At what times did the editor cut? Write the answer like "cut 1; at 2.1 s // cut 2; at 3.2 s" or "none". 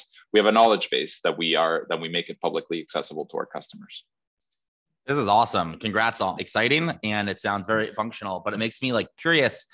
cut 1; at 6.4 s // cut 2; at 7.9 s